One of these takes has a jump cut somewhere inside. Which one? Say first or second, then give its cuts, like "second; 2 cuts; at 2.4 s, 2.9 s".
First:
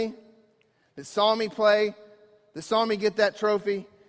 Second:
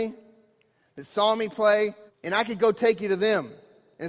second; 1 cut; at 2.1 s